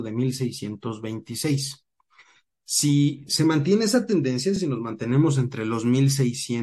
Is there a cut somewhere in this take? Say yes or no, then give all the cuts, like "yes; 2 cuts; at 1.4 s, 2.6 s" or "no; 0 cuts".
no; 0 cuts